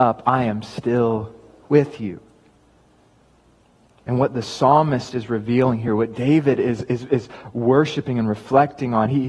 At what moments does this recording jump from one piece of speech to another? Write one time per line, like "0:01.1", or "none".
none